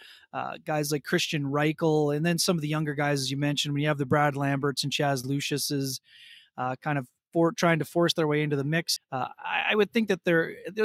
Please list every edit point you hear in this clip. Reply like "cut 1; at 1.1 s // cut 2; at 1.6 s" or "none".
cut 1; at 9.0 s

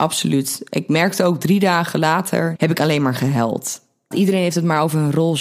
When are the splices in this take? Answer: cut 1; at 2.6 s // cut 2; at 4.1 s

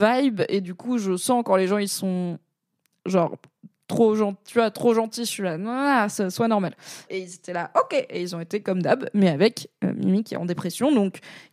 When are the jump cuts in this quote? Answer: cut 1; at 7.1 s

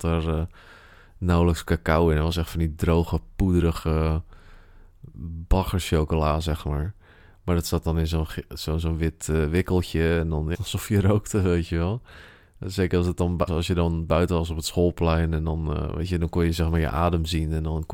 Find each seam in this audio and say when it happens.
cut 1; at 10.5 s // cut 2; at 13.5 s

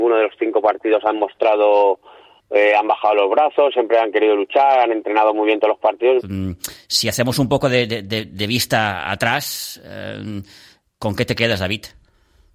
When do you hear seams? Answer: cut 1; at 6.2 s

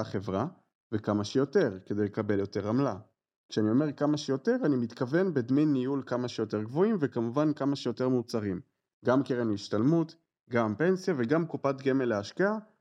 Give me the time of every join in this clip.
none

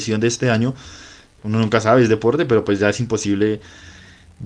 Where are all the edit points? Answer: cut 1; at 1.4 s

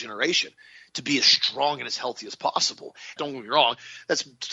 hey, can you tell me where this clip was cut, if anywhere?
cut 1; at 3.2 s

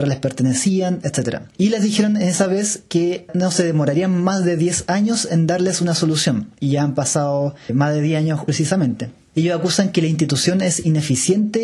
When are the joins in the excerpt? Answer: none

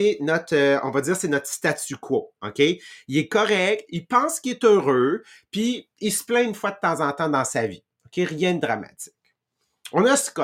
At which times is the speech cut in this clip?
none

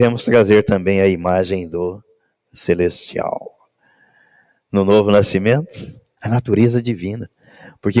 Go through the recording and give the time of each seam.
cut 1; at 6.2 s

